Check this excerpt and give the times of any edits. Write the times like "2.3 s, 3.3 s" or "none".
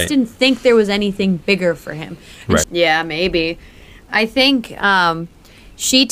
2.6 s

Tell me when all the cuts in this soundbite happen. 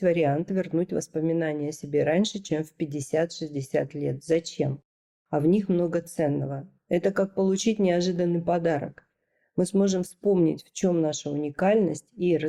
none

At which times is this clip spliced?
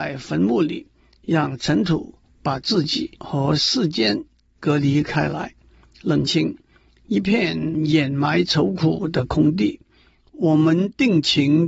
6.3 s

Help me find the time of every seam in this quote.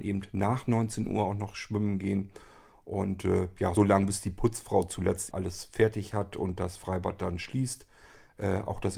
3.8 s, 5.3 s

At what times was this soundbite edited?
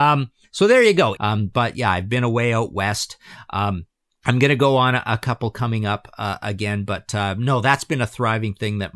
1.2 s

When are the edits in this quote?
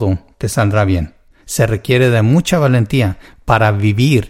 1.4 s

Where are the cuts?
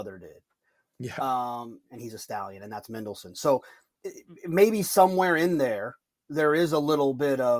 1.8 s

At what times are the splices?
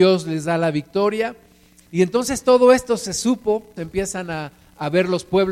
1.8 s, 3.8 s

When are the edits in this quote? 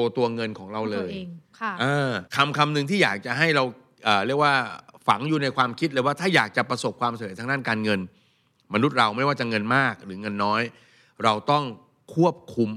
2.3 s

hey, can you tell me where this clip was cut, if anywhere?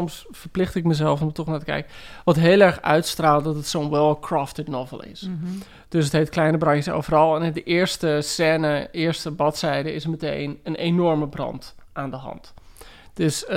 none

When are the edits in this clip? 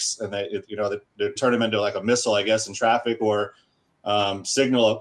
1.4 s

